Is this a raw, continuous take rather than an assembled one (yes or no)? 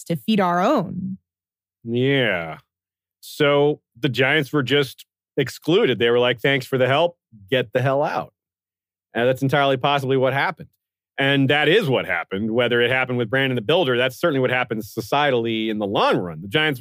yes